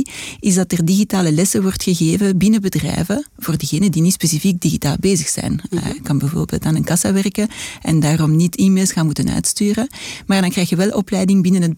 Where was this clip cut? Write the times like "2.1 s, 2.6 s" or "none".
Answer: none